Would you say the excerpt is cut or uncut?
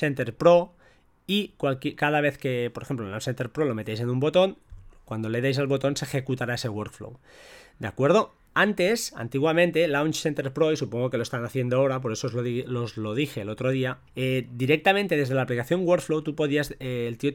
cut